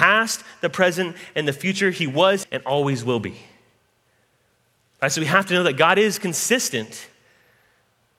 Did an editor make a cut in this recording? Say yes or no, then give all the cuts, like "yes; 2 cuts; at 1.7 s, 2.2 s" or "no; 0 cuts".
yes; 1 cut; at 2.4 s